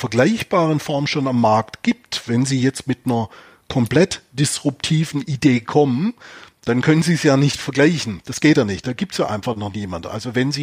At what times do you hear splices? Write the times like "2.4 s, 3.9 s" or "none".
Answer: none